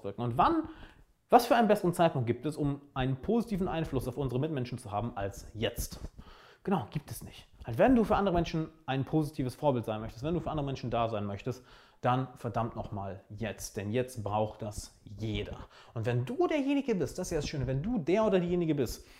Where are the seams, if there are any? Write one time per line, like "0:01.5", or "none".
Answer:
none